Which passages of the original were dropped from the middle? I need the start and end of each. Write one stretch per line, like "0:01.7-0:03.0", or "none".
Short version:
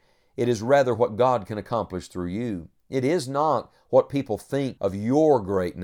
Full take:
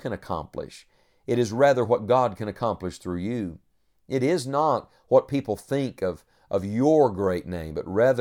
0:03.7-0:04.0
0:06.0-0:06.5

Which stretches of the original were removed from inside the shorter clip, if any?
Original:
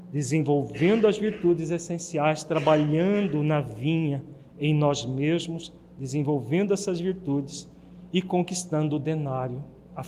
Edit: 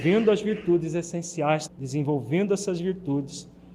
0:02.4-0:05.9

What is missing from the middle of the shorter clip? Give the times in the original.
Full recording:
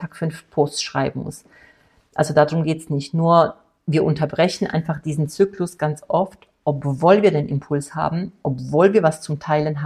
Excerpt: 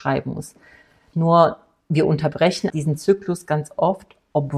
0:02.0-0:03.1
0:04.7-0:05.0

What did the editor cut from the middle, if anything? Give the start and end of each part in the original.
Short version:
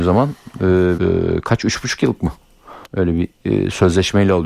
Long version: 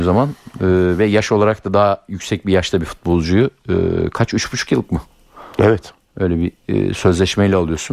0:01.0-0:03.7
0:05.5-0:06.1

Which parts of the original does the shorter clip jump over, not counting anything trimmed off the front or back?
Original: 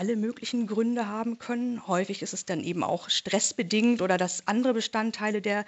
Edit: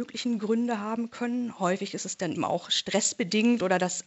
0:02.6-0:02.7

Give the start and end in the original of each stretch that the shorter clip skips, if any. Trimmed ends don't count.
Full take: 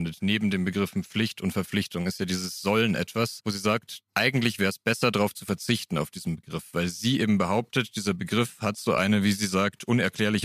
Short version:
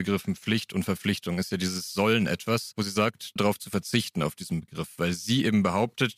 0:04.0-0:05.1

